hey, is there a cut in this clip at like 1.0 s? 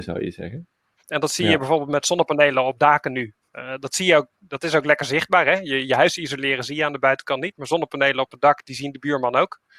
yes; 1 cut; at 1.0 s

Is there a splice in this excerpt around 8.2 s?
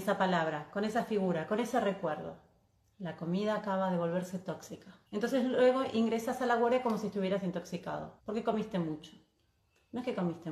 yes; 3 cuts; at 2.9 s, 5.1 s, 8.2 s

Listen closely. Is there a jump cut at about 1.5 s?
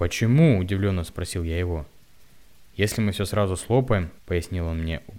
no; 2 cuts; at 2.7 s, 4.2 s

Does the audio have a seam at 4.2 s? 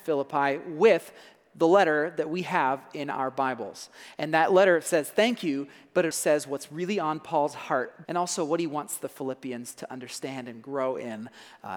no; 2 cuts; at 6.1 s, 8.0 s

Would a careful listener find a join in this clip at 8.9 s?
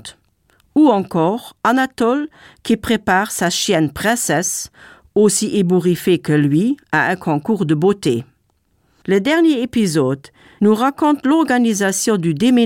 yes; 2 cuts; at 8.9 s, 10.6 s

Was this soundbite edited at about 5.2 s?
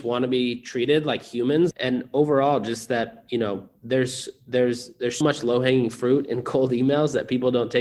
yes; 2 cuts; at 1.7 s, 5.2 s

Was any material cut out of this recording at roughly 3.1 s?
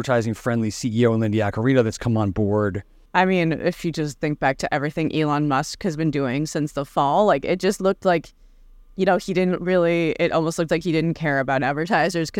yes; 1 cut; at 3.1 s

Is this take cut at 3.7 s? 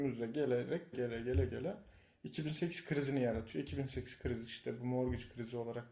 no; 1 cut; at 0.9 s

